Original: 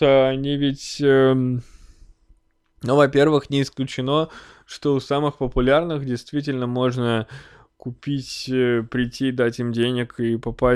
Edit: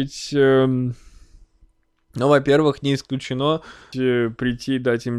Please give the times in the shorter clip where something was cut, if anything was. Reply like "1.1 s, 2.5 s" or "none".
3.9 s